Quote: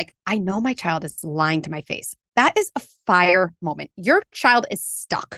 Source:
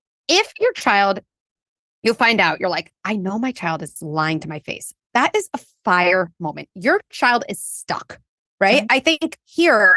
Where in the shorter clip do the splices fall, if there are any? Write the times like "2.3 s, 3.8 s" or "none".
none